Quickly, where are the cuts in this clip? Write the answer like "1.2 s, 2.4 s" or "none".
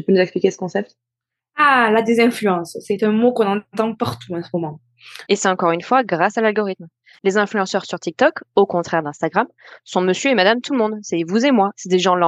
5.3 s, 7.2 s